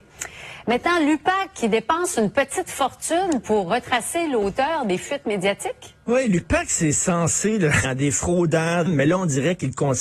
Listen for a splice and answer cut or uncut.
cut